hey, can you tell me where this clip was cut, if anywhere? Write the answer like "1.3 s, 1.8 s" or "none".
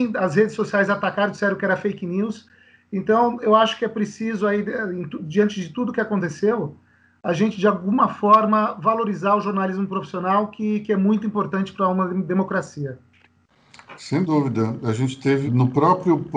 15.5 s